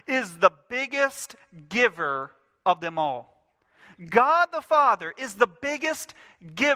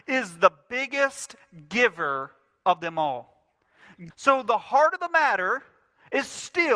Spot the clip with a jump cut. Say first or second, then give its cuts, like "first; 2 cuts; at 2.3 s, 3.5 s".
second; 1 cut; at 4.1 s